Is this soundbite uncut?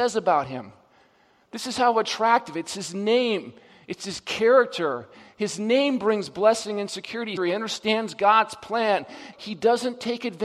no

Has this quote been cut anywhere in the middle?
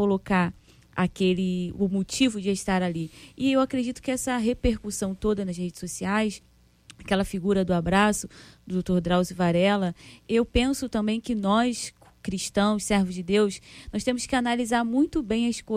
no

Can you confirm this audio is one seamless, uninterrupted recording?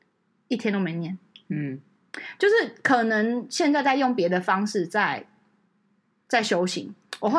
yes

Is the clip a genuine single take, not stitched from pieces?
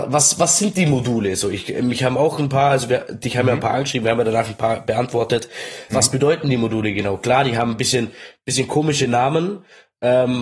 no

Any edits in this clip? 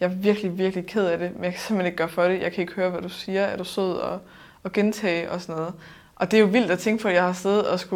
no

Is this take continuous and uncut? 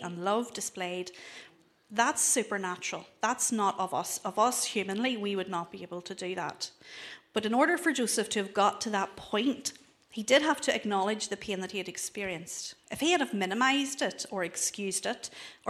yes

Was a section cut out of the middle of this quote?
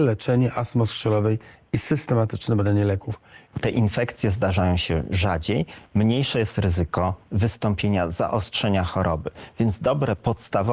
yes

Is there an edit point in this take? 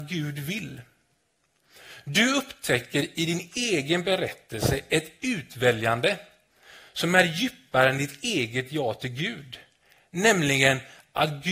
no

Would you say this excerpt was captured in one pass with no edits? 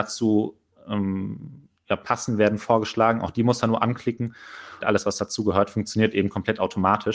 no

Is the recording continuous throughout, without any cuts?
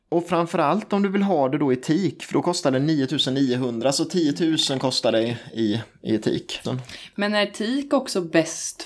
no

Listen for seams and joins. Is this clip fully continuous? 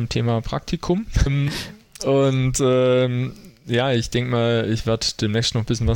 no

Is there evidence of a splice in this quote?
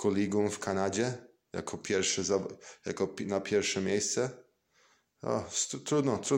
no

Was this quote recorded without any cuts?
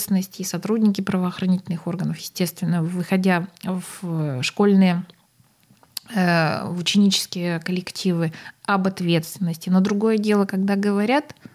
yes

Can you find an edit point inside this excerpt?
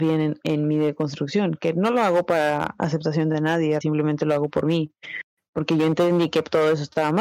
yes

